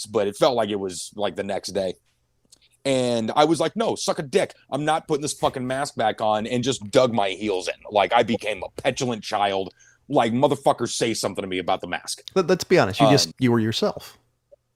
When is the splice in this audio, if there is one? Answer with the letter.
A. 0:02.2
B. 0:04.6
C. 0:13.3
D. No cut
C